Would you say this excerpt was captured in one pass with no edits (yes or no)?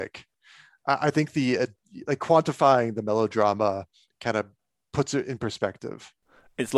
yes